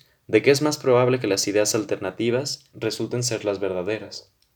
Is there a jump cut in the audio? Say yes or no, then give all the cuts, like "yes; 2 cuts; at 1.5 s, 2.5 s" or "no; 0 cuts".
yes; 1 cut; at 2.7 s